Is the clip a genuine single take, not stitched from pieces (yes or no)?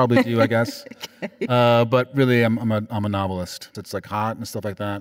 no